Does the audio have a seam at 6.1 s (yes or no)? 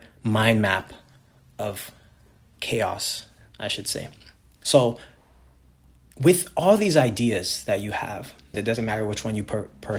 no